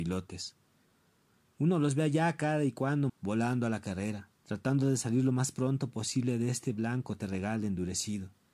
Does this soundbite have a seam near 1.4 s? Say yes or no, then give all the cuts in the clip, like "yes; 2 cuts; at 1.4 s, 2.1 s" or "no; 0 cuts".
no; 2 cuts; at 3.1 s, 4.4 s